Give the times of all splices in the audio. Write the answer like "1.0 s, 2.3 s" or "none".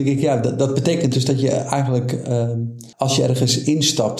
2.9 s